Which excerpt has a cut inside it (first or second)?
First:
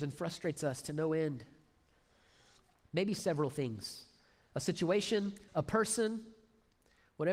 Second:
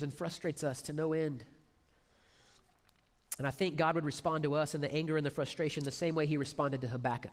first